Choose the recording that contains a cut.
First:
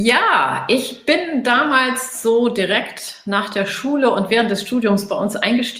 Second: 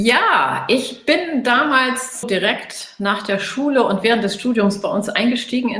second; 1 cut; at 2.2 s

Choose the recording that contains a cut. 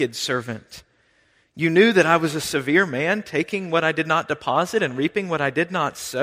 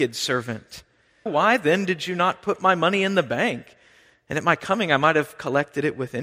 second; 1 cut; at 1.3 s

